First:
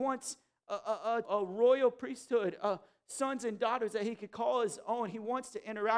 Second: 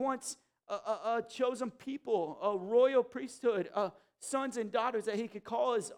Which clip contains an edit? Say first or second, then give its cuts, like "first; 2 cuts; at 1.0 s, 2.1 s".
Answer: first; 1 cut; at 1.2 s